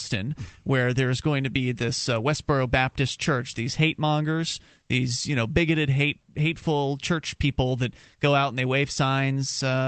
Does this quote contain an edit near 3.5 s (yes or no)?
no